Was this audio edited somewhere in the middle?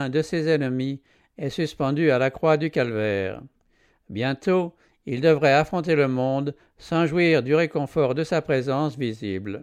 no; 0 cuts

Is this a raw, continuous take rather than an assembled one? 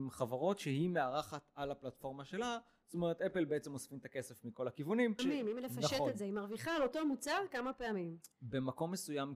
no; 1 cut; at 5.2 s

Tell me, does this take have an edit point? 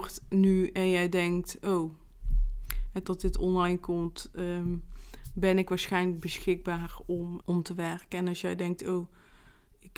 yes; 2 cuts; at 3.0 s, 7.4 s

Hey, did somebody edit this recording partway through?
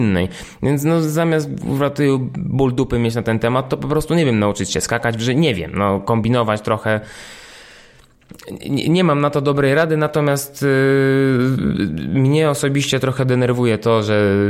no; 0 cuts

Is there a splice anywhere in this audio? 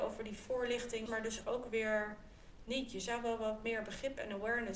yes; 1 cut; at 1.1 s

